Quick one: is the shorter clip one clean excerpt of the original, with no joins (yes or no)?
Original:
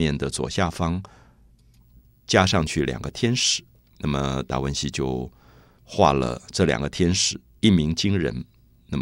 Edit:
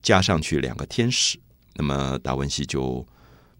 yes